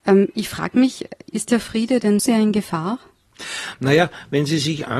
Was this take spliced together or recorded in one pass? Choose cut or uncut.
cut